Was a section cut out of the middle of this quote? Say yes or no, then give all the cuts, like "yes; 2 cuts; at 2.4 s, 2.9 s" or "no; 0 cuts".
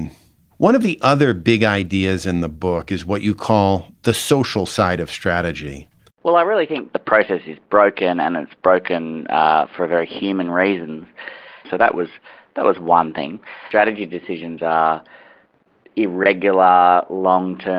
yes; 2 cuts; at 6.1 s, 11.6 s